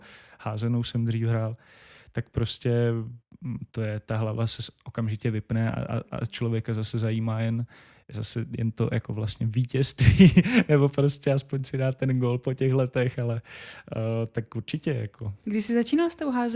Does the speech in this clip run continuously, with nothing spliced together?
yes; 0 cuts

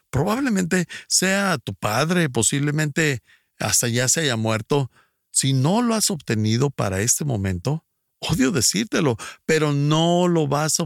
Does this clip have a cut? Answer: no; 0 cuts

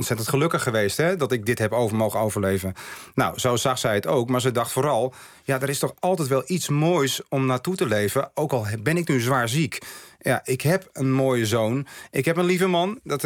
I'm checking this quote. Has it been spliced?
no; 0 cuts

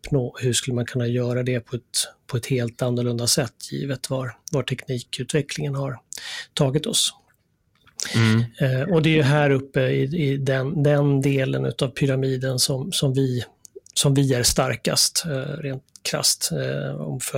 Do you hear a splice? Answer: no; 0 cuts

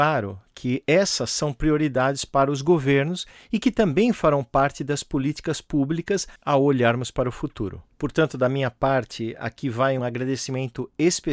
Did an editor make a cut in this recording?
yes; 2 cuts; at 7.9 s, 10.0 s

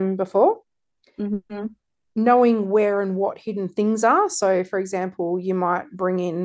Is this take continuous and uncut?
yes; 0 cuts

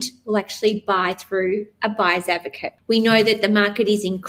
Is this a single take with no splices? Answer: yes; 0 cuts

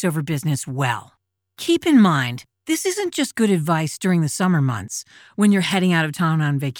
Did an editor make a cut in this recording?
no; 0 cuts

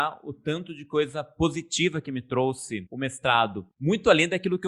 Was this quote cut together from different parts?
no; 0 cuts

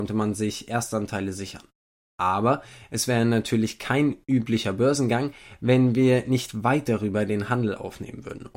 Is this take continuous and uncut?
yes; 0 cuts

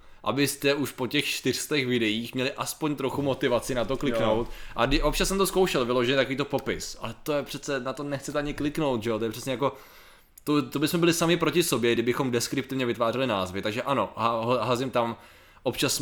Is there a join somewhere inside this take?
no; 0 cuts

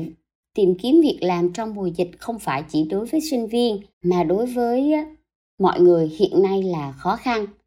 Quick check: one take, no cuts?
no; 1 cut; at 3.9 s

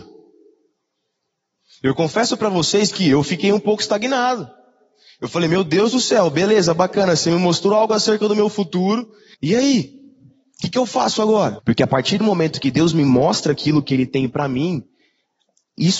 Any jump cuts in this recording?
yes; 2 cuts; at 9.3 s, 11.6 s

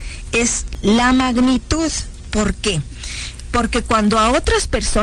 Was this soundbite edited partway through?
no; 0 cuts

